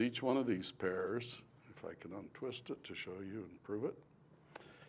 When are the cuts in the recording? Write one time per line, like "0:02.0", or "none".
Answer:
none

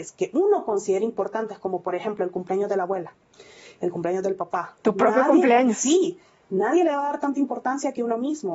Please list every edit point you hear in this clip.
none

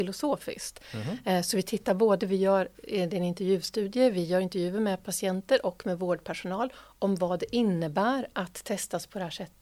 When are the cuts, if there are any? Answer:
none

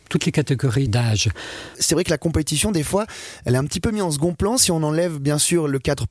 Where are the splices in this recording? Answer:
0:01.7

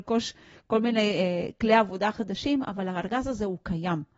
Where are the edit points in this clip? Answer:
none

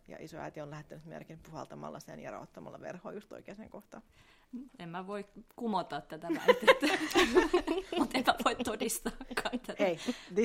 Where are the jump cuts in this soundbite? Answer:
0:04.7

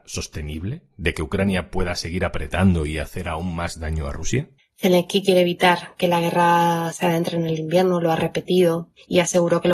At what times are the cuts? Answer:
0:04.6

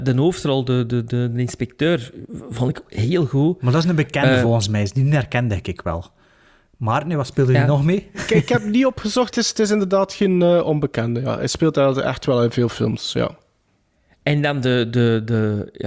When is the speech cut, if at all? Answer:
0:09.3

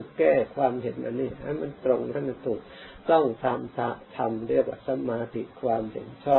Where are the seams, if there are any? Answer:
0:05.3

